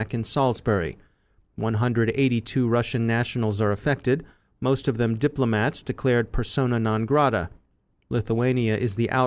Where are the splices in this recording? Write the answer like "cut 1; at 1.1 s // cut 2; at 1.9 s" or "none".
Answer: none